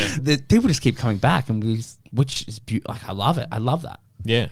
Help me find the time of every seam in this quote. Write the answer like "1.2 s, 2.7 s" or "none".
2.1 s